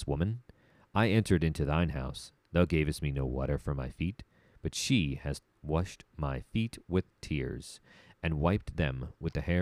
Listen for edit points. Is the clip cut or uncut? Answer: uncut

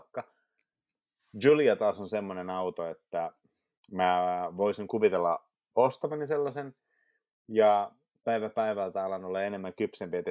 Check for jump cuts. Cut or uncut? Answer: uncut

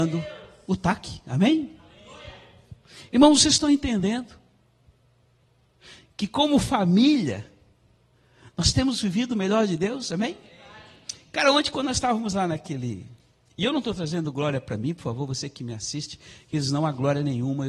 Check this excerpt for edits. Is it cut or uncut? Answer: uncut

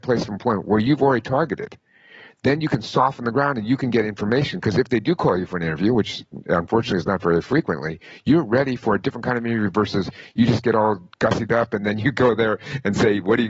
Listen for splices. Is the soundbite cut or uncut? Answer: uncut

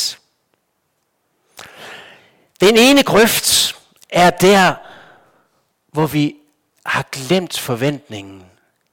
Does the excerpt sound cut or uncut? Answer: uncut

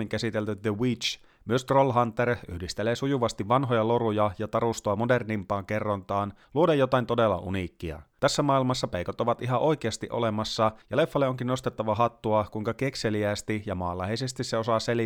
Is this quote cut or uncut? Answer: uncut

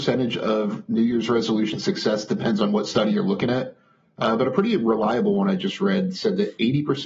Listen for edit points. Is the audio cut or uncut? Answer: uncut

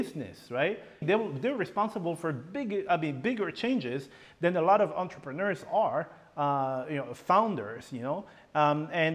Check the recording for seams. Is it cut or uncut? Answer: cut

